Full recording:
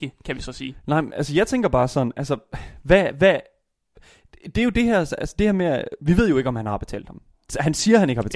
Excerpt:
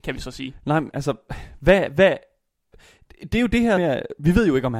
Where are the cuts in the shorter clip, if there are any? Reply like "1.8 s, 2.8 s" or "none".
0.9 s, 3.8 s